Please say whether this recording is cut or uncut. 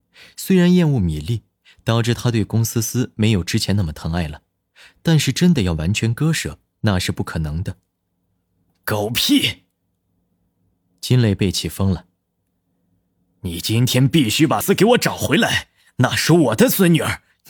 cut